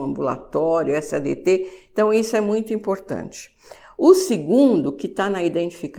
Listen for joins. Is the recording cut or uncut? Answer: uncut